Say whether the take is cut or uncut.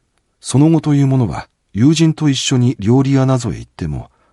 uncut